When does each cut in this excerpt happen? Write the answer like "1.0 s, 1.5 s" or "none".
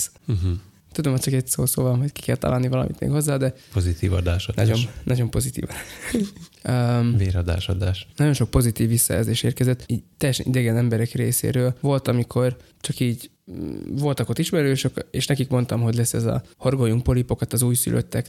none